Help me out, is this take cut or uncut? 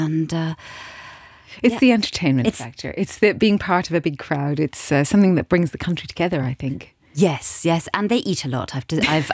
uncut